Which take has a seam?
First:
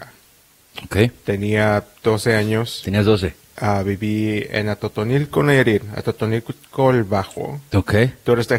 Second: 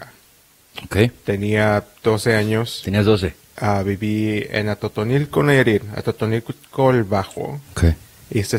second; 1 cut; at 7.6 s

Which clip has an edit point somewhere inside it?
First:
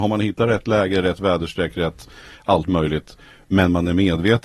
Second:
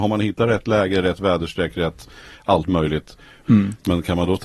second; 1 cut; at 3.4 s

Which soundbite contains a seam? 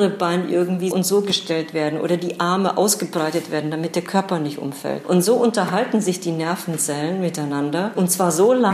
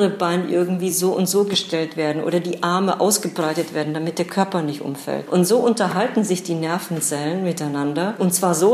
first; 1 cut; at 0.9 s

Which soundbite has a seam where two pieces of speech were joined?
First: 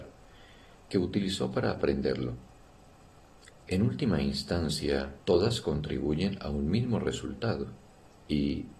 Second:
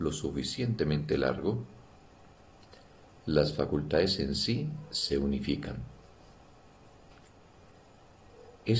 first; 2 cuts; at 3.5 s, 5.2 s

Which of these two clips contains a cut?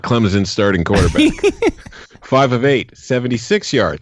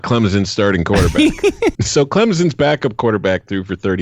second; 1 cut; at 1.8 s

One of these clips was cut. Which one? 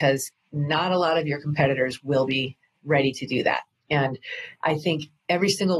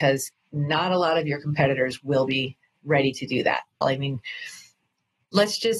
second; 1 cut; at 3.8 s

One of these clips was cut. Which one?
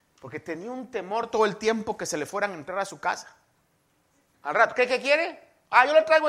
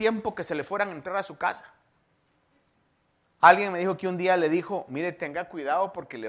first; 1 cut; at 4.3 s

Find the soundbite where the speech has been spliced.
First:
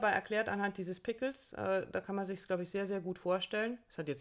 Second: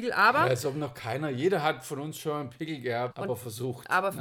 second; 1 cut; at 3.1 s

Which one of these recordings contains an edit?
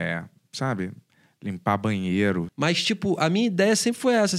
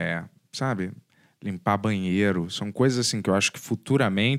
first; 1 cut; at 2.5 s

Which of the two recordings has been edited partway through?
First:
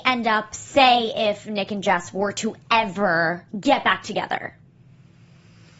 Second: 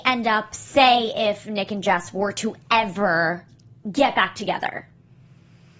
first; 1 cut; at 3.5 s

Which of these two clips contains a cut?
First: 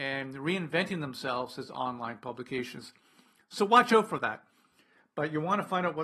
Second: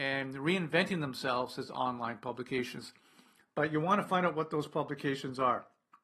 second; 1 cut; at 3.5 s

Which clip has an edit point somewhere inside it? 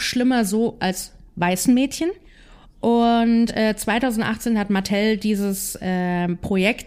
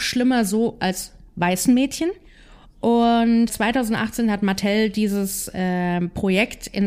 second; 1 cut; at 3.5 s

